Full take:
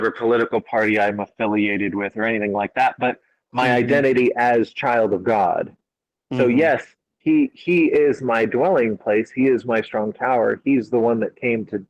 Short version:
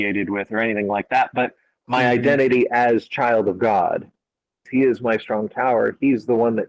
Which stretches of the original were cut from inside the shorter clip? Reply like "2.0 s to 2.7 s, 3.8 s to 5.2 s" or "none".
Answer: 6.3 s to 9.3 s